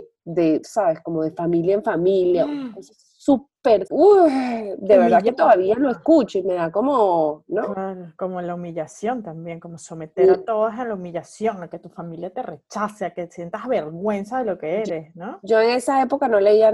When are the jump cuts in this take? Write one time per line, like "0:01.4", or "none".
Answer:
0:03.9